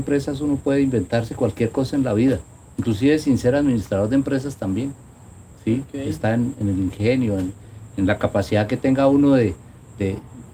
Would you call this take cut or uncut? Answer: uncut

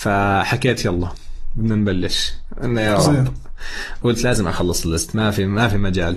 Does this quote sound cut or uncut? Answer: cut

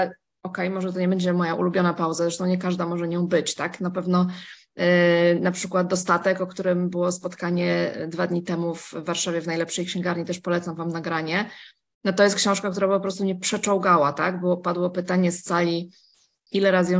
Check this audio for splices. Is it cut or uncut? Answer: uncut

